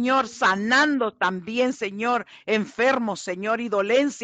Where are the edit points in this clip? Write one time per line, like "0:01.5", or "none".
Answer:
none